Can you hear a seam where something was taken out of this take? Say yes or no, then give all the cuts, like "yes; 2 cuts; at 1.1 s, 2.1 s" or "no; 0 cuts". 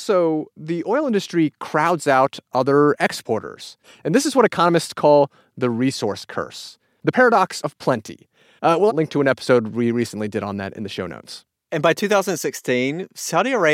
yes; 1 cut; at 8.9 s